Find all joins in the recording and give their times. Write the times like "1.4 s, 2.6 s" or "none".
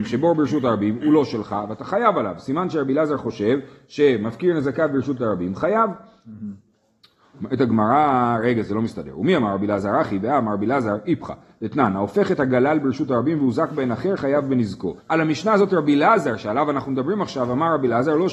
15.0 s